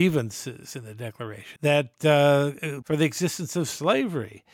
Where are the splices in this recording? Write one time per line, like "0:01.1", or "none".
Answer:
0:01.6
0:02.8